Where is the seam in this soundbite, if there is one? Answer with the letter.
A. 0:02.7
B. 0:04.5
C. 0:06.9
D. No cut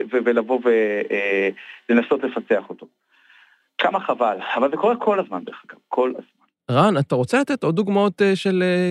D